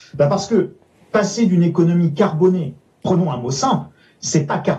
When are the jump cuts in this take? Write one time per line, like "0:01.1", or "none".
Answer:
0:02.9

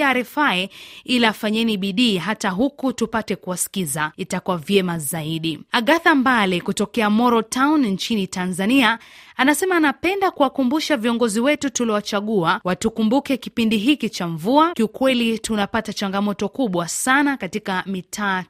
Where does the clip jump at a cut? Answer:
0:14.7

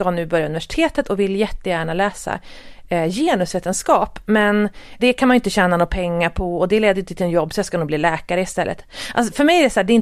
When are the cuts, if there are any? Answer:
0:05.0

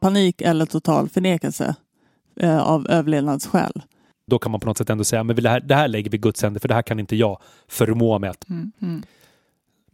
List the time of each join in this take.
0:04.3
0:08.7

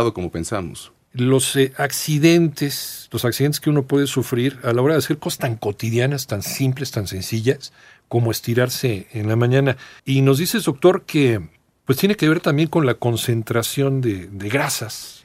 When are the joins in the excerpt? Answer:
0:10.0

